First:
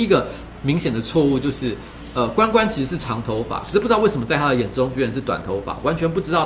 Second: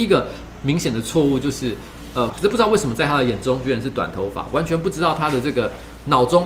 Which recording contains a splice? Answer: second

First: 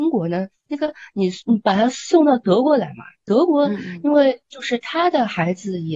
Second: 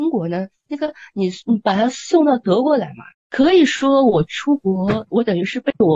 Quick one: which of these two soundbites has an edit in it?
second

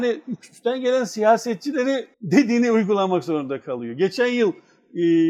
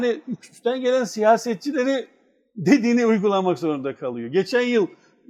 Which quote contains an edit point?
first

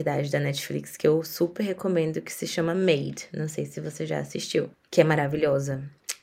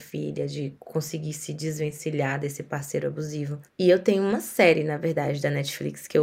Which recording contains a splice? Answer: second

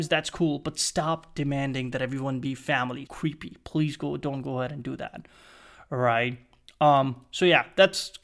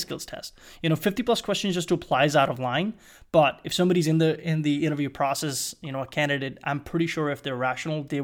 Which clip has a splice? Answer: first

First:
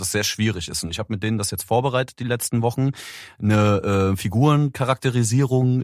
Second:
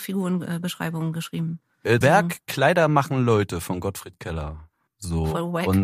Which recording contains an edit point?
second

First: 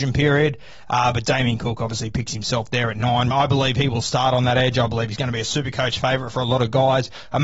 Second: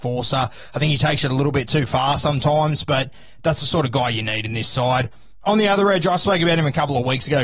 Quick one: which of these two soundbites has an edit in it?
first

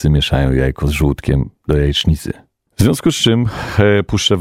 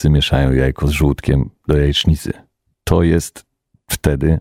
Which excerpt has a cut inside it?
first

